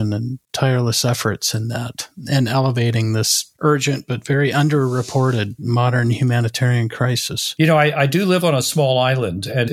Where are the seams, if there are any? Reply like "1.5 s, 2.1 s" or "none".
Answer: 7.6 s